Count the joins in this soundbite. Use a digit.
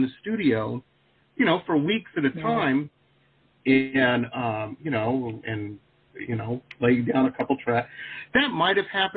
1